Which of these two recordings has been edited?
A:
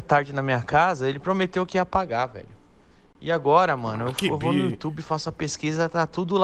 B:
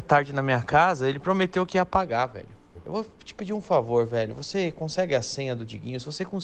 B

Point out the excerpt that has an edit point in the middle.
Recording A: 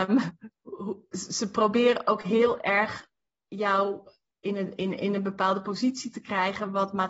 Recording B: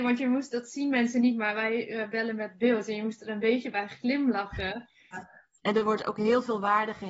B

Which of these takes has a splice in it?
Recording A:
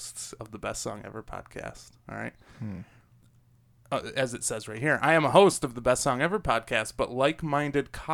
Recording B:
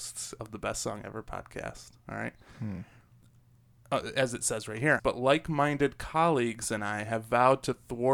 B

